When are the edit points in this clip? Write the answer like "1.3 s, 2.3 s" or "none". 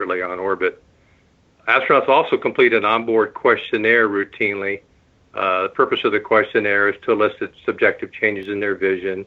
none